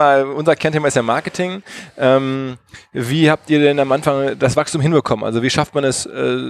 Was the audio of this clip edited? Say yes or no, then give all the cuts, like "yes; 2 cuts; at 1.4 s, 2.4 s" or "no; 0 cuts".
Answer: no; 0 cuts